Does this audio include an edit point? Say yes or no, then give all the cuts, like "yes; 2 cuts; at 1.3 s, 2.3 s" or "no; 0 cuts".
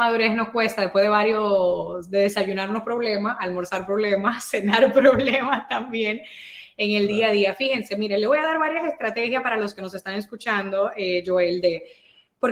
no; 0 cuts